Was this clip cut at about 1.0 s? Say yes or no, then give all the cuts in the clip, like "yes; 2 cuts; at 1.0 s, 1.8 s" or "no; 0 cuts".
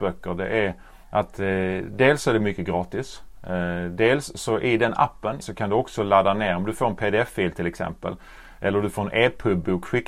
yes; 2 cuts; at 1.0 s, 5.4 s